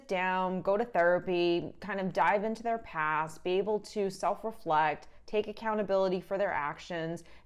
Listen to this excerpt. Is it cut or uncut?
uncut